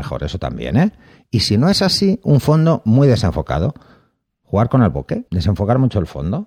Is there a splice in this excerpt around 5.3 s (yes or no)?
yes